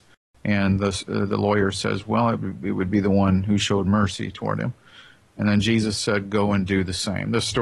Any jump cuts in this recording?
no; 0 cuts

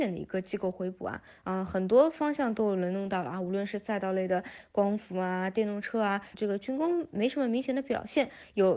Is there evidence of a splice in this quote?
yes; 1 cut; at 6.3 s

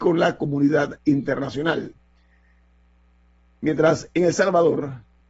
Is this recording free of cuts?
yes; 0 cuts

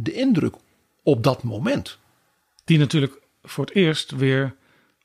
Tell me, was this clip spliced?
yes; 1 cut; at 2.6 s

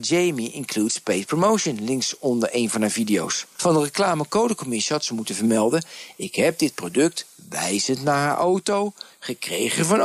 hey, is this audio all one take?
no; 1 cut; at 3.5 s

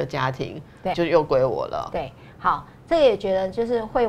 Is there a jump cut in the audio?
yes; 1 cut; at 0.9 s

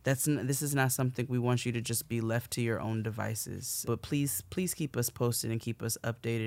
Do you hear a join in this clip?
yes; 1 cut; at 3.8 s

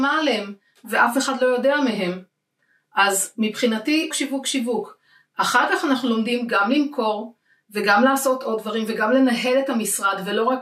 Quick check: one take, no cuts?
no; 1 cut; at 4.1 s

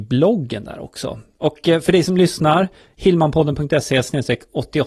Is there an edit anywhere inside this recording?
no; 0 cuts

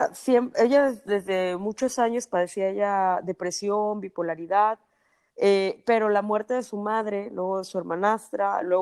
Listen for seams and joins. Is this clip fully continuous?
yes; 0 cuts

